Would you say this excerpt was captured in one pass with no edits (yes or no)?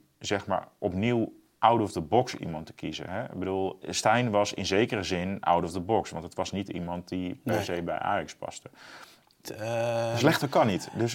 no